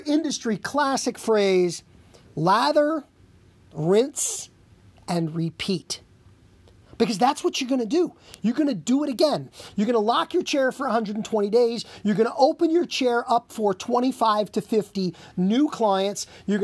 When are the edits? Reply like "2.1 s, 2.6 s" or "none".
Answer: none